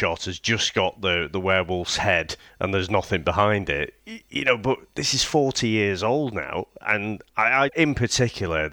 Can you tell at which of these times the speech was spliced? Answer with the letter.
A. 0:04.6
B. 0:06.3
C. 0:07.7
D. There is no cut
C